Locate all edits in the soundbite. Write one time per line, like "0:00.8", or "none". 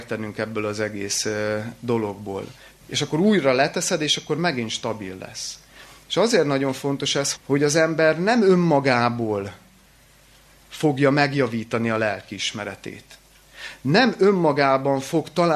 0:02.8
0:07.3